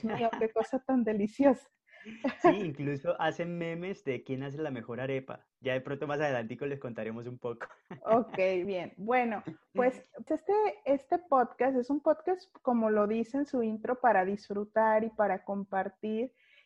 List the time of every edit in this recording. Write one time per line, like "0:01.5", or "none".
0:08.7
0:10.3